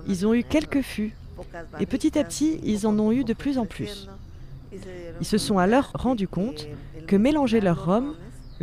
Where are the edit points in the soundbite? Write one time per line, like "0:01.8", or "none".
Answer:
none